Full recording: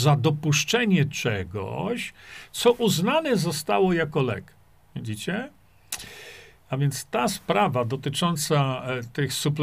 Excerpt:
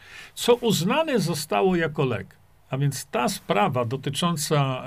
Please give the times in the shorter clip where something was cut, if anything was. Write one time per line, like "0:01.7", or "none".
0:02.6

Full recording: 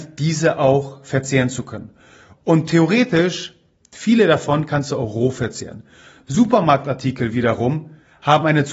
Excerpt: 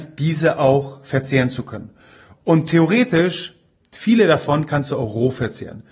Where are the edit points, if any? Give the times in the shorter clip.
none

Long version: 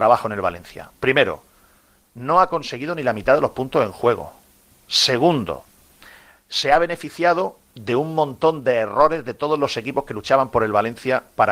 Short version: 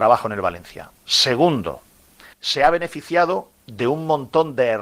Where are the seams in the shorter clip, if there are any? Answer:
0:01.0
0:02.3

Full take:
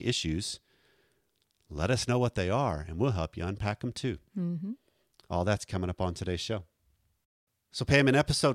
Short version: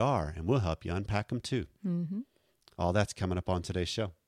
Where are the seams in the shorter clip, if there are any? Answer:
none

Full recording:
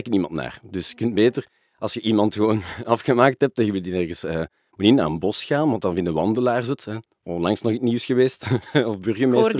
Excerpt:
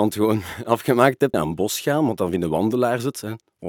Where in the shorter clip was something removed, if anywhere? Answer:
0:01.3

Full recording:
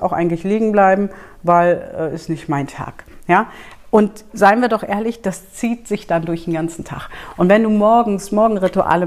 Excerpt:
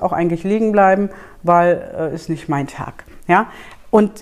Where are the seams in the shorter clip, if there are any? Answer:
none

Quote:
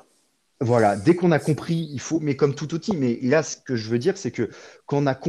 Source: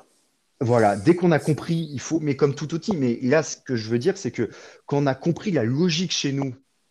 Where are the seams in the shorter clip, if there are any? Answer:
none

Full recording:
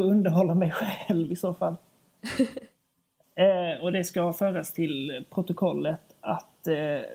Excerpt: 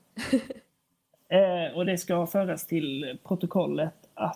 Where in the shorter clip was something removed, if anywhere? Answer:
none

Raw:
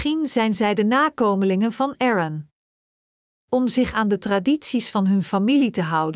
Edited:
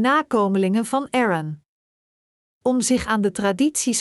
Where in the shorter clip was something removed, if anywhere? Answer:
none

